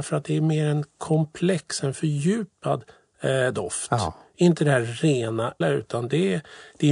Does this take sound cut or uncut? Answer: cut